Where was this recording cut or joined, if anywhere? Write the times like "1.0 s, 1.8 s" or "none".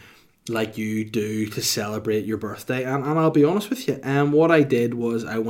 none